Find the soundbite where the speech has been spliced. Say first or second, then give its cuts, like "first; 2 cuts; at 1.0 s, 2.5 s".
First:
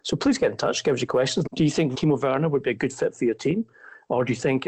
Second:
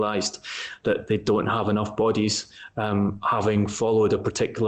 first; 1 cut; at 1.4 s